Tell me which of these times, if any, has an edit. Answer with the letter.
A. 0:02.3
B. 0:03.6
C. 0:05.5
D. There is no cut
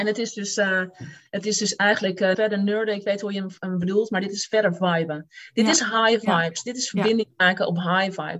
A